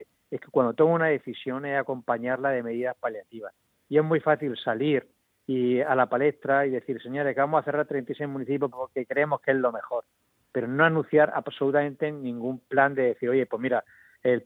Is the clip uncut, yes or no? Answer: yes